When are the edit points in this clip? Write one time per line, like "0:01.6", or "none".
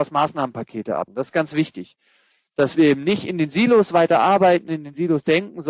0:01.1